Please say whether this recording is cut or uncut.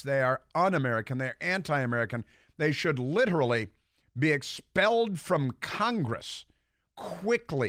uncut